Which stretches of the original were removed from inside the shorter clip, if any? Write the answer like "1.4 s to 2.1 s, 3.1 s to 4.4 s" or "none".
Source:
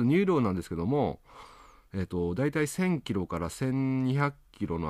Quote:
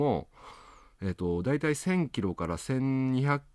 none